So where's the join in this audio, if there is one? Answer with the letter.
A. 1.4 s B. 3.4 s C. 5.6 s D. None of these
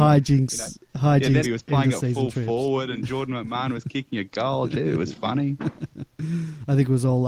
A